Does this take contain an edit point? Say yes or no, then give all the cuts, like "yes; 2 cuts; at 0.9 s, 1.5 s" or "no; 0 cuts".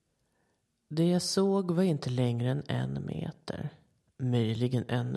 no; 0 cuts